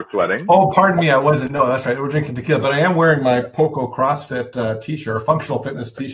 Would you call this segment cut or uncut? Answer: uncut